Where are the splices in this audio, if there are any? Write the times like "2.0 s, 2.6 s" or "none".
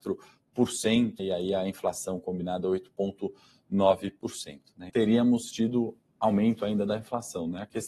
1.2 s, 4.9 s